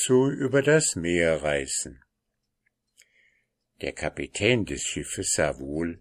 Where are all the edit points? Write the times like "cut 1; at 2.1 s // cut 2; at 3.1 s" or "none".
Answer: none